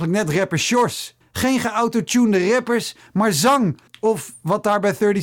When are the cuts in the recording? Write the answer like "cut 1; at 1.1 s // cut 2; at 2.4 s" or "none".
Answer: cut 1; at 1.2 s // cut 2; at 3.9 s